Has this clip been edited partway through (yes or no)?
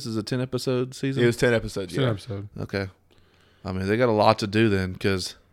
no